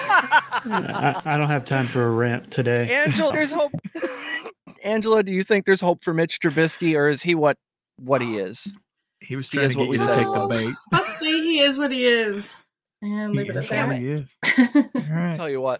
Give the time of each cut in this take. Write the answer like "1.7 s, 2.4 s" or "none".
3.3 s